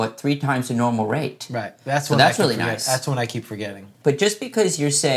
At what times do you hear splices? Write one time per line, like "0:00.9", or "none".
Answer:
0:04.0